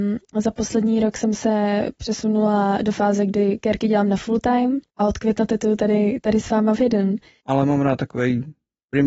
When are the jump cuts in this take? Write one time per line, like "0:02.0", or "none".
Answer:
0:04.9
0:07.4